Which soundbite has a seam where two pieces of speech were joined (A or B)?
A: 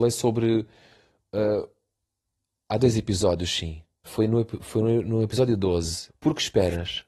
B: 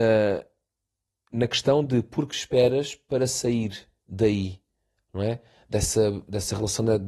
A